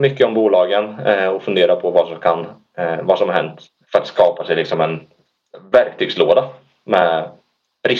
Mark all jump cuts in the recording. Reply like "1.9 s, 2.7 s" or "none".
3.8 s